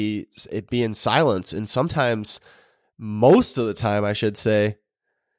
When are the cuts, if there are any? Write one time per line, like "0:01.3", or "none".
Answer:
none

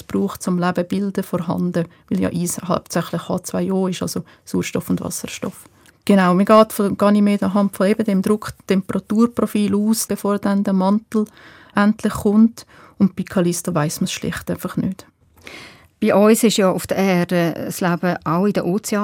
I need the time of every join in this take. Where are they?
0:05.9
0:10.1

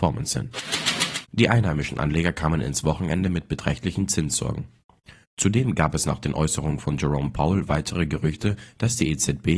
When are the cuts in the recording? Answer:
none

